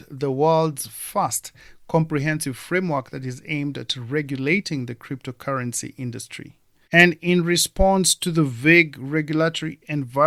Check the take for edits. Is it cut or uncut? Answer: cut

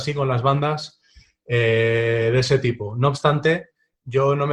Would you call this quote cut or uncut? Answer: uncut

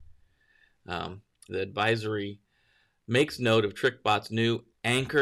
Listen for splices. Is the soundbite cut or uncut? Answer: cut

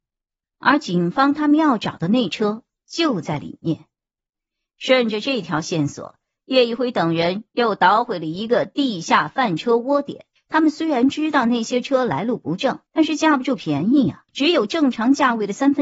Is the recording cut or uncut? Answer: cut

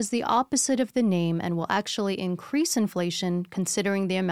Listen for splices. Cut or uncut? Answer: uncut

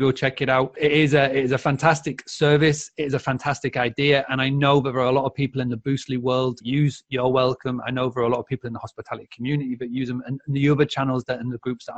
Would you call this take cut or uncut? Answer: uncut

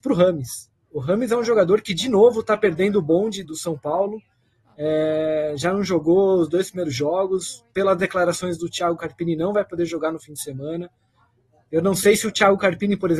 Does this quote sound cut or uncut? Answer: cut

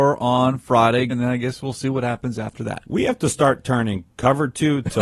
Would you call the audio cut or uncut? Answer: cut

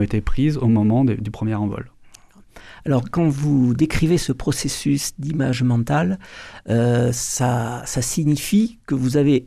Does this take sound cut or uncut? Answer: uncut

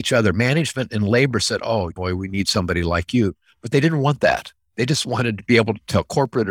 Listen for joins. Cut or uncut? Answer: cut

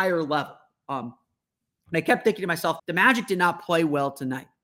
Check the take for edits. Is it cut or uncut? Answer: cut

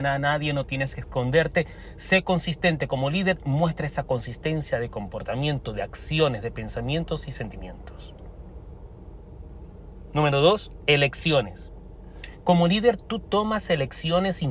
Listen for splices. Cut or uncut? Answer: uncut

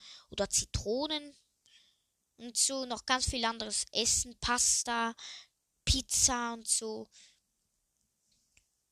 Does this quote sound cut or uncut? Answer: uncut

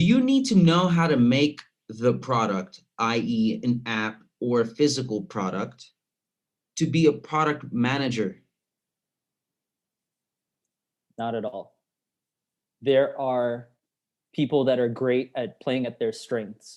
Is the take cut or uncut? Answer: uncut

